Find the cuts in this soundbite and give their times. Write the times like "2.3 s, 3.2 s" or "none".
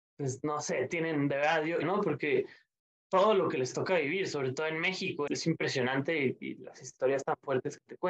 1.8 s, 5.3 s